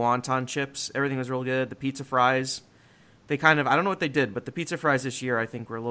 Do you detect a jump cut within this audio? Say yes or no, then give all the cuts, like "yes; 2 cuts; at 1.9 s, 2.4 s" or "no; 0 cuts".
no; 0 cuts